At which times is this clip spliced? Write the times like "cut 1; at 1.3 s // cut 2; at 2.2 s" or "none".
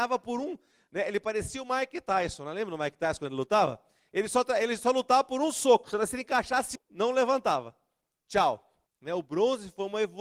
cut 1; at 6.8 s // cut 2; at 8.9 s